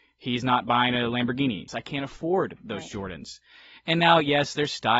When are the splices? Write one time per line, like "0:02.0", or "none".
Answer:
0:01.7

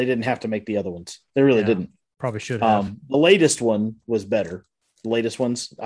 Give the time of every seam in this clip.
none

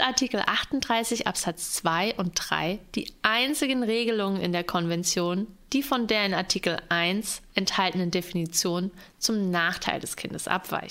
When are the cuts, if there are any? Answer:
none

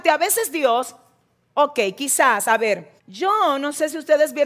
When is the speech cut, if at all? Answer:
0:03.0

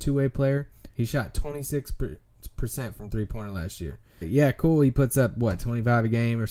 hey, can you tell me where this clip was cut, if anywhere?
0:00.9
0:04.2

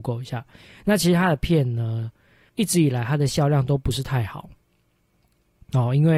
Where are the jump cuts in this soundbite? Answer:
0:02.5

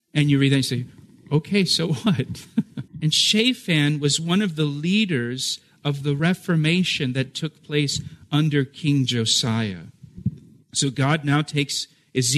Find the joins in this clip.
0:02.9
0:10.6

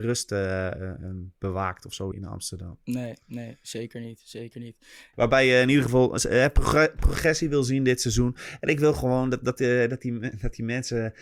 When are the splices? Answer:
0:02.1
0:05.1

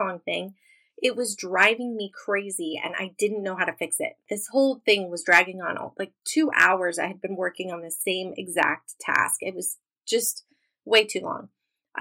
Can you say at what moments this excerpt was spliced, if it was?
none

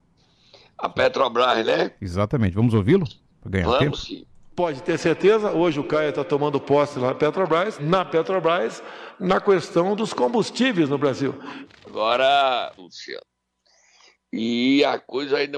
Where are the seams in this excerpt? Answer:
0:07.8
0:11.7
0:12.8

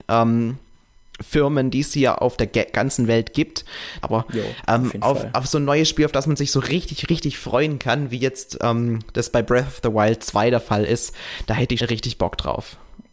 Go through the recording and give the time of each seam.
0:04.0
0:11.8

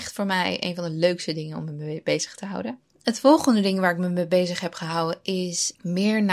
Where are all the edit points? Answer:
none

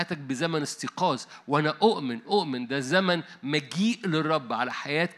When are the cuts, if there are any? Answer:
0:02.2

